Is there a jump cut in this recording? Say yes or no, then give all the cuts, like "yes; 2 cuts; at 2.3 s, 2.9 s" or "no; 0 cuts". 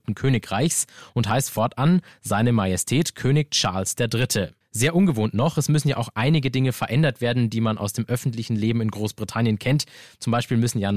no; 0 cuts